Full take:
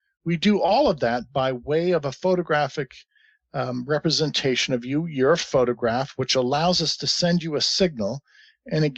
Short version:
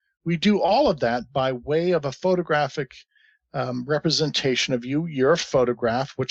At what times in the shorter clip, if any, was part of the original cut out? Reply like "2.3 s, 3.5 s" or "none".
none